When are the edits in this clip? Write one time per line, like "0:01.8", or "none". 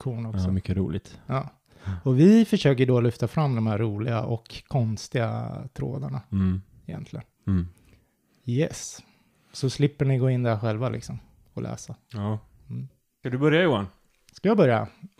none